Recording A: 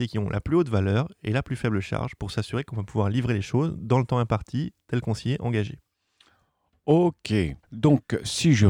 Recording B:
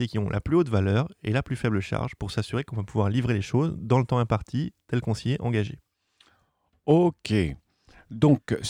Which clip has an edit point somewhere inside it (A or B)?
A